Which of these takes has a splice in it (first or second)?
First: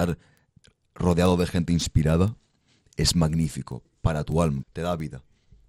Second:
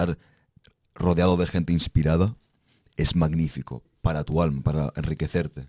first